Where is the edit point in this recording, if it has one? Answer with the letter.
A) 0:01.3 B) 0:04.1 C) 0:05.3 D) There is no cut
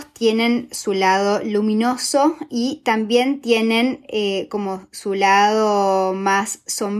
D